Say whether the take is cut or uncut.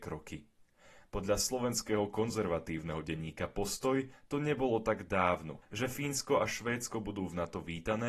cut